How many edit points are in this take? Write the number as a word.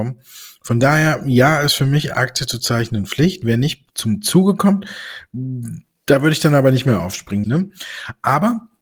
two